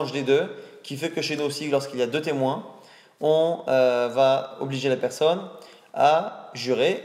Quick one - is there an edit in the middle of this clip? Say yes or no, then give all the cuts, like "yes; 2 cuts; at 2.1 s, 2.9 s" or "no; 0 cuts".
no; 0 cuts